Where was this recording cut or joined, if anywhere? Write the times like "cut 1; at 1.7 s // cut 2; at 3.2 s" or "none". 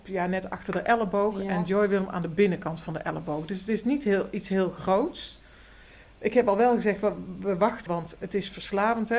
cut 1; at 7.9 s